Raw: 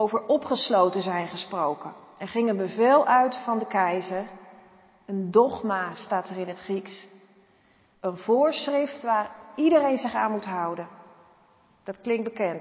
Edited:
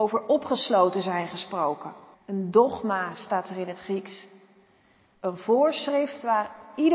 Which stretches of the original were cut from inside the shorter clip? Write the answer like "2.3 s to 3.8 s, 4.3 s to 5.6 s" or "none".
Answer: 2.1 s to 4.9 s